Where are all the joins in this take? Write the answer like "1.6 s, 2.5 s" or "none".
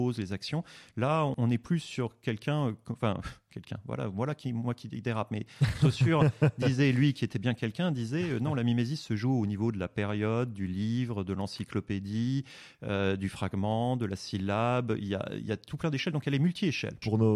none